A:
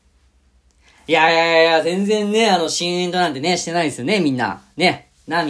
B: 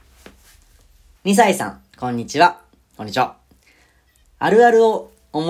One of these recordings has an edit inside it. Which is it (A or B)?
B